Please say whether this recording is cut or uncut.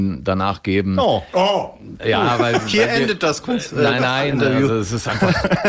cut